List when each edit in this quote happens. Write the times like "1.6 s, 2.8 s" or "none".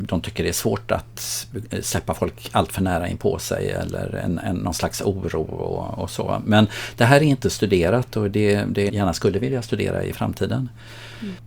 8.9 s